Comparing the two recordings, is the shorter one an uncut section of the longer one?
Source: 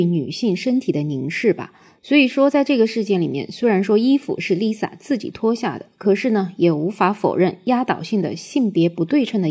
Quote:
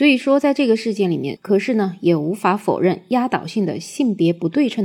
no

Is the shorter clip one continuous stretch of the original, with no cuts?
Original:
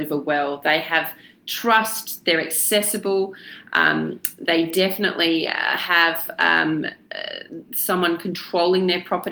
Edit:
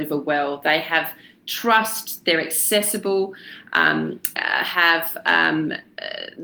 no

